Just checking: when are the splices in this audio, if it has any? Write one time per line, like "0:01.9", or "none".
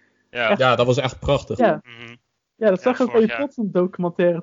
0:01.6

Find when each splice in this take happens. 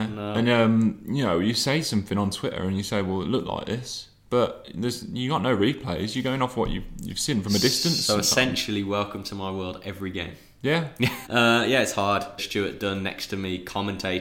0:11.3
0:12.4

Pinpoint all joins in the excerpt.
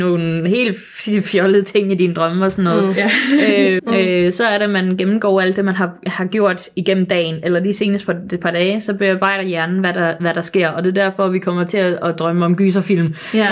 0:03.8

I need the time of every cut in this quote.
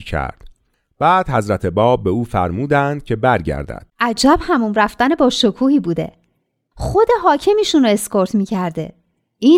0:03.9

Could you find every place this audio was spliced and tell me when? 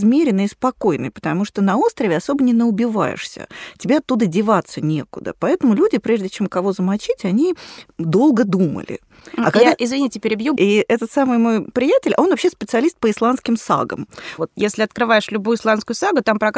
0:10.6
0:14.4

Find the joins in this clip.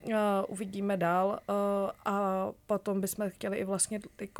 none

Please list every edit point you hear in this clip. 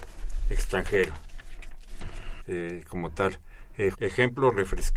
0:02.4
0:03.9

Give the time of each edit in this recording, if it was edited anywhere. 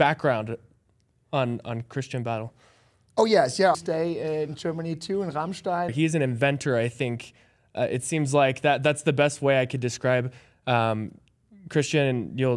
0:03.7
0:05.9

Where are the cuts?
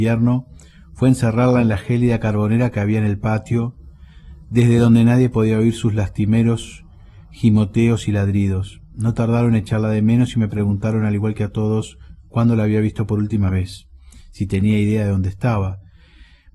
none

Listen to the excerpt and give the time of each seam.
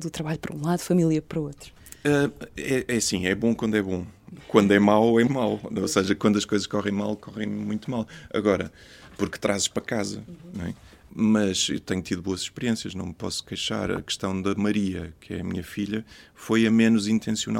0:05.3

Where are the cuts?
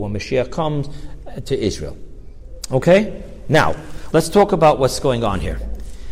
0:04.1

